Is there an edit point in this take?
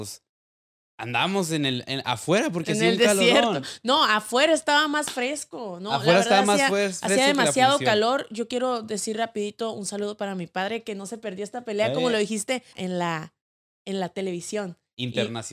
yes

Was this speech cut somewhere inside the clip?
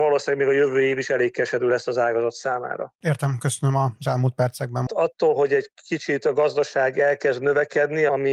yes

